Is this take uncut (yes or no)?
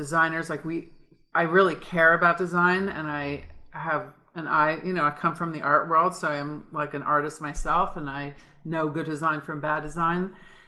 yes